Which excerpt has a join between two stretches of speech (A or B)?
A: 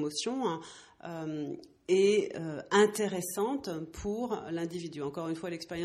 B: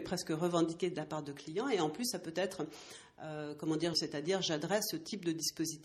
B